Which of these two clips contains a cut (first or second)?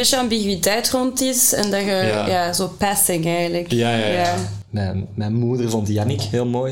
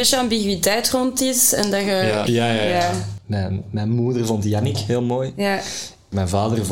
second